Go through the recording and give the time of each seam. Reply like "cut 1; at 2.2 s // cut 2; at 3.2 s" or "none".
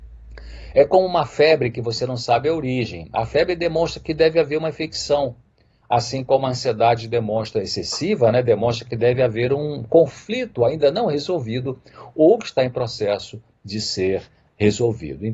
none